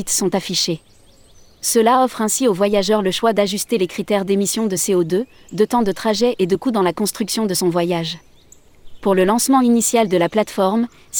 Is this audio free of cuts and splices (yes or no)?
yes